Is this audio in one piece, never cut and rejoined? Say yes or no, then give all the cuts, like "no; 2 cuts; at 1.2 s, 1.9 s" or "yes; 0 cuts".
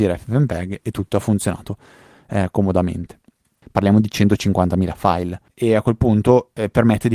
no; 2 cuts; at 3.6 s, 5.5 s